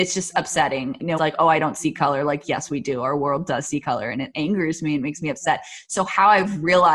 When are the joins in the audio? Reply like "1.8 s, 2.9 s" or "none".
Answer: 1.2 s